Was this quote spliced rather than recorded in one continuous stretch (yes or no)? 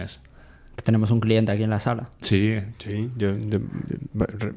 no